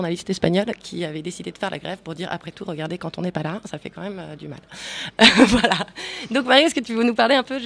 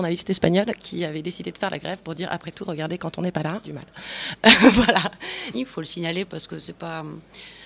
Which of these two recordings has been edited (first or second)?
second